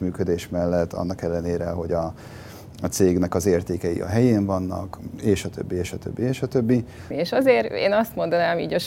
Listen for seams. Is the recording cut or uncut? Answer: cut